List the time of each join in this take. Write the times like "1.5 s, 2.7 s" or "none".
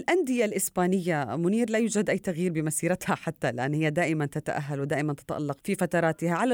5.6 s